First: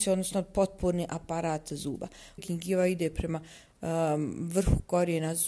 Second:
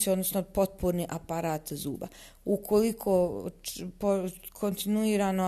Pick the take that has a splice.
first; 1 cut; at 2.4 s

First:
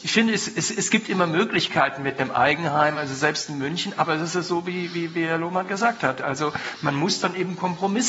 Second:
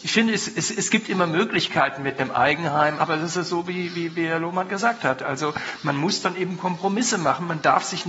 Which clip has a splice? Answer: second; 1 cut; at 3.0 s

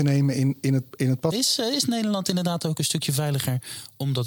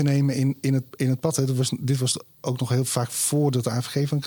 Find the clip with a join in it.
first; 1 cut; at 1.3 s

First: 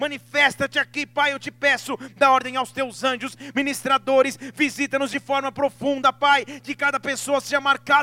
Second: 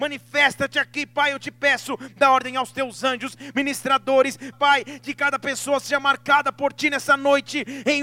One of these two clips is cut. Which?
second; 1 cut; at 4.5 s

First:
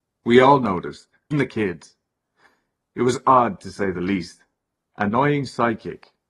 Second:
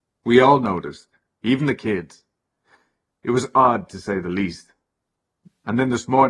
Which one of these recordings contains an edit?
first; 2 cuts; at 1.3 s, 4.8 s

